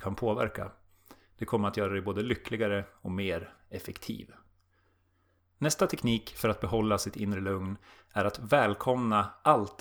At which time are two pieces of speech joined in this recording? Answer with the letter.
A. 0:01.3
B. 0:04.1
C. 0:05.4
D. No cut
D